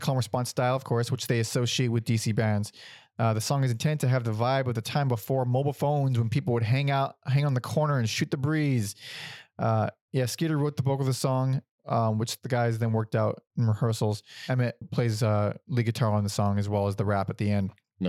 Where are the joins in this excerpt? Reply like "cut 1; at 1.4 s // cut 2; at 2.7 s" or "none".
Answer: cut 1; at 14.8 s